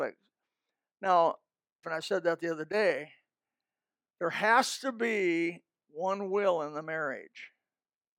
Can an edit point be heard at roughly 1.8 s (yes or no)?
yes